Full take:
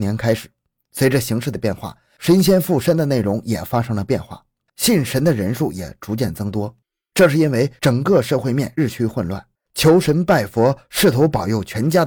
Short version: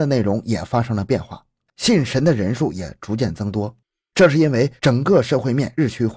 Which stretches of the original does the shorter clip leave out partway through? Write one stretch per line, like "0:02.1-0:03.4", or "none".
none